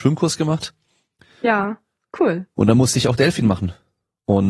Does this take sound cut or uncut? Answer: uncut